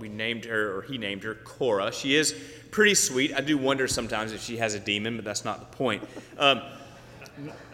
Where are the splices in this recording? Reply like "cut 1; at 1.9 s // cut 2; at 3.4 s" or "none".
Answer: none